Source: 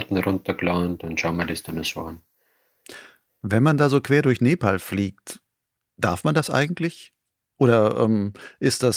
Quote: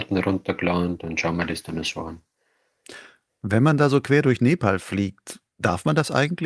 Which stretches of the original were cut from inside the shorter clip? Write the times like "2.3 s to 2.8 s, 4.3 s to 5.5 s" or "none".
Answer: 5.5 s to 5.9 s